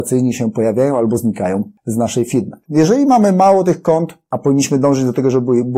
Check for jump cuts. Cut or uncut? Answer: cut